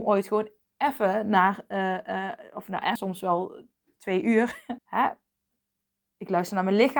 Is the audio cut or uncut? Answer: cut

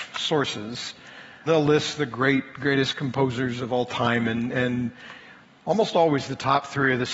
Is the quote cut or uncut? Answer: cut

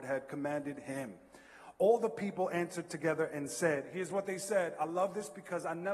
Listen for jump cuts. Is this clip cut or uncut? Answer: uncut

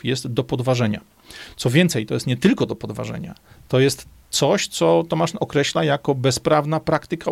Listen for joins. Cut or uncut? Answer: uncut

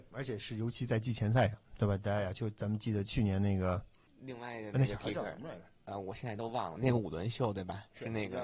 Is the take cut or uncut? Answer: uncut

